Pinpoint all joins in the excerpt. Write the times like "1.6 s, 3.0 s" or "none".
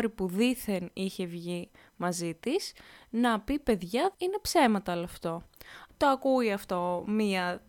4.1 s, 5.9 s